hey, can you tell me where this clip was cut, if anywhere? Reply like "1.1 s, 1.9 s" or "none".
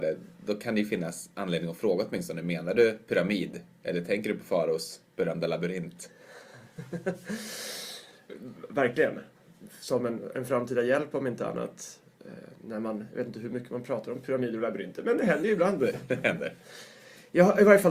none